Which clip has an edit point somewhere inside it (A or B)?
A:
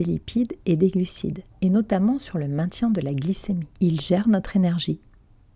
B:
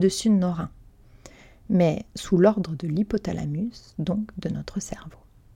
A